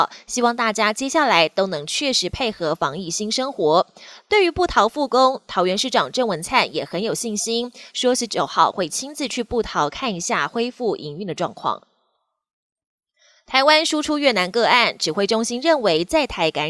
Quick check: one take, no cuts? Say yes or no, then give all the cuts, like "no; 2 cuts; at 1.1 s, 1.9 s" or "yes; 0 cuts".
yes; 0 cuts